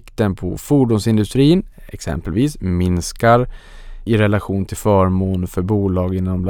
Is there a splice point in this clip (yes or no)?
yes